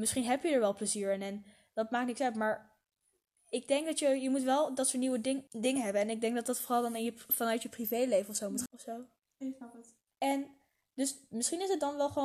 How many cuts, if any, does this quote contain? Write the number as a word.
three